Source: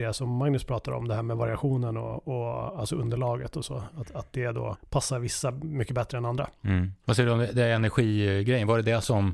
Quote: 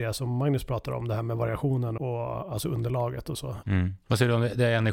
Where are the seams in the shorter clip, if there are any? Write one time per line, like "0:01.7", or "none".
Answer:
0:02.0
0:03.6